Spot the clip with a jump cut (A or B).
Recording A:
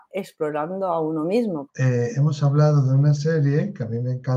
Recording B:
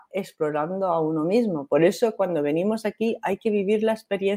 A